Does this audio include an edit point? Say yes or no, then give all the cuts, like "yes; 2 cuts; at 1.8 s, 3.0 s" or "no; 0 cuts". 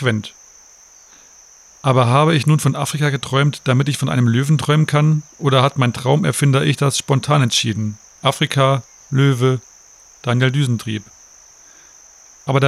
no; 0 cuts